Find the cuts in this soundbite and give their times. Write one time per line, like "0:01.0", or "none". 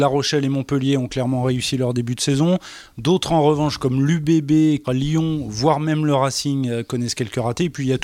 0:04.8